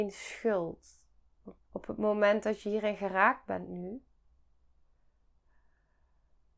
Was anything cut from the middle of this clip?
yes; 1 cut; at 1.6 s

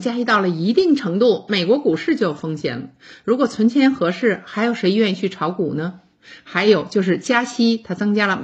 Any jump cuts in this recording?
no; 0 cuts

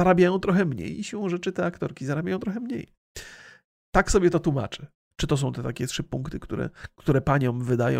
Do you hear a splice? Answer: yes; 1 cut; at 5.1 s

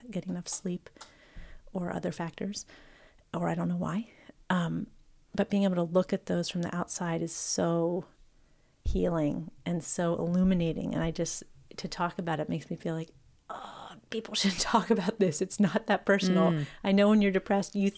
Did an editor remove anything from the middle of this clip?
no; 0 cuts

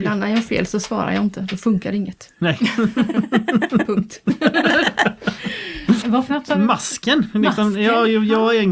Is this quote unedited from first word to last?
no; 1 cut; at 6.0 s

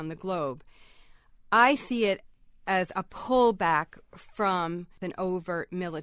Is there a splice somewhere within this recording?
no; 0 cuts

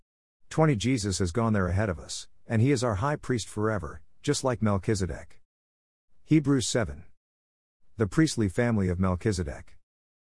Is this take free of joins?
yes; 0 cuts

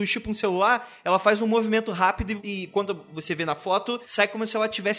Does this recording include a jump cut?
no; 0 cuts

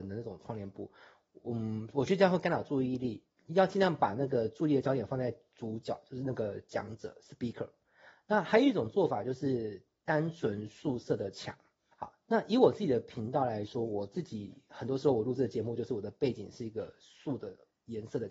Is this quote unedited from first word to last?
no; 1 cut; at 11.9 s

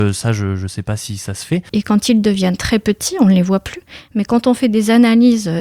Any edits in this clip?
yes; 1 cut; at 1.7 s

